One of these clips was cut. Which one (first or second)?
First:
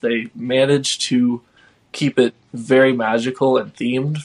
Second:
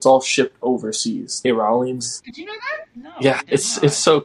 second